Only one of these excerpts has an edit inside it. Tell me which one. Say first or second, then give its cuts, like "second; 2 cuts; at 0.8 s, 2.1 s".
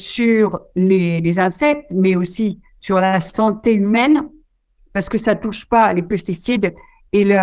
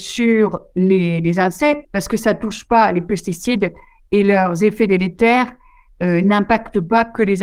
second; 1 cut; at 1.8 s